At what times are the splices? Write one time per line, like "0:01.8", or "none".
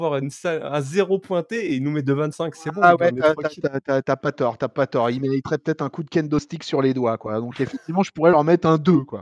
none